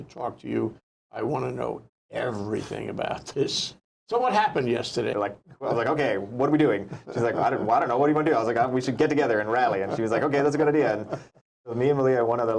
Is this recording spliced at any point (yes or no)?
yes